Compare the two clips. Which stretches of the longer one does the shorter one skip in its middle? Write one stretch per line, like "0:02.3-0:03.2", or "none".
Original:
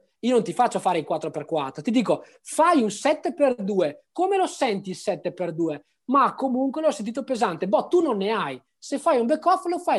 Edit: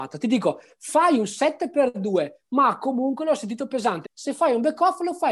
0:04.1-0:06.0
0:07.6-0:08.7